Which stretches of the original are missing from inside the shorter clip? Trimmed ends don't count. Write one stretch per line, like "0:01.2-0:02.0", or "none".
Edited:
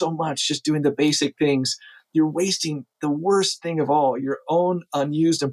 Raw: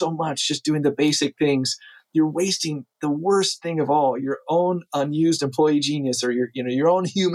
none